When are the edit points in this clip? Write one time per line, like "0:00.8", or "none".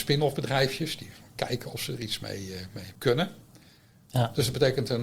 0:03.0
0:04.1